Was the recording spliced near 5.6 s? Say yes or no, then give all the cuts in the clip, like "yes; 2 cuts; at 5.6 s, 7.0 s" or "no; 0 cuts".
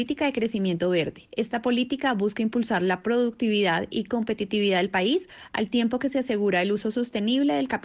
no; 1 cut; at 1.3 s